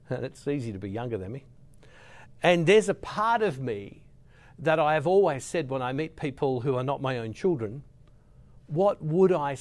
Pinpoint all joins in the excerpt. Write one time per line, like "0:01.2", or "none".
none